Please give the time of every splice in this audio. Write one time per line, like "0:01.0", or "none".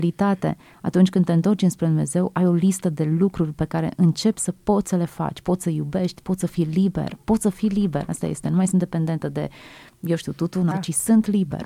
0:10.7